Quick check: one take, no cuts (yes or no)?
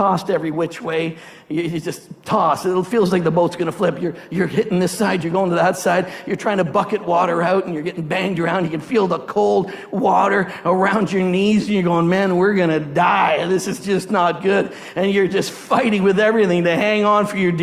yes